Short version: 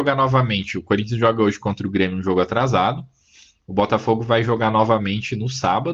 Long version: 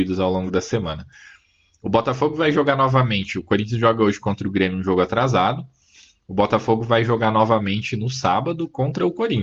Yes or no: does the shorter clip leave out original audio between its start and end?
no